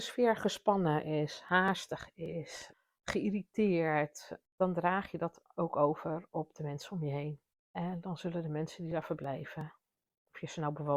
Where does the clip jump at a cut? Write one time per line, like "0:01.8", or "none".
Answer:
0:04.5